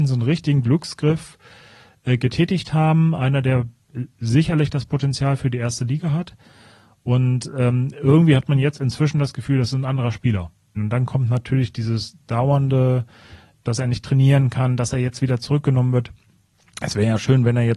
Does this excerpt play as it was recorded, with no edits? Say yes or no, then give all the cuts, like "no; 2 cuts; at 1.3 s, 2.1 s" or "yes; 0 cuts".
no; 2 cuts; at 10.8 s, 13.7 s